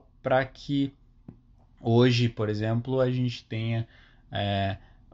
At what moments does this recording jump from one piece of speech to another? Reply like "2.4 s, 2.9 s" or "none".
none